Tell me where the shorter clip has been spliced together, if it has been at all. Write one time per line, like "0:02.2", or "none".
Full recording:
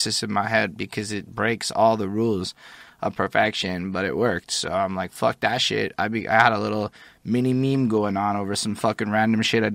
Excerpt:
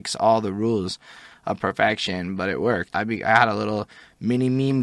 0:02.9